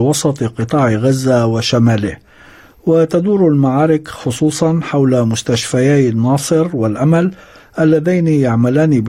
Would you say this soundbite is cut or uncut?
uncut